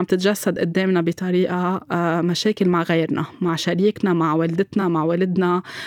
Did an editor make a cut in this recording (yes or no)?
no